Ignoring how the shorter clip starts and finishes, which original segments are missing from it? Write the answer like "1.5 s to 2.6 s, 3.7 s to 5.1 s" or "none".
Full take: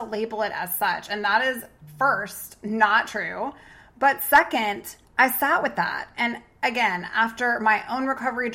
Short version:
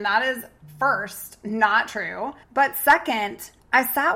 3.6 s to 3.9 s